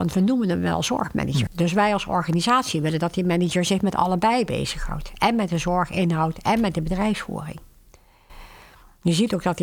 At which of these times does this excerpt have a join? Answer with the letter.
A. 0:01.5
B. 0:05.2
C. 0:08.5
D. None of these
A